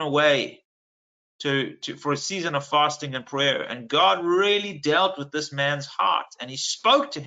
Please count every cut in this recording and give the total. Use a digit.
0